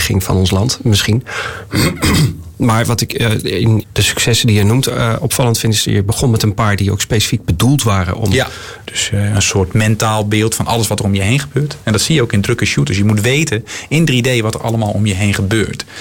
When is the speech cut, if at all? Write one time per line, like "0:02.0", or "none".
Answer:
0:03.8
0:08.8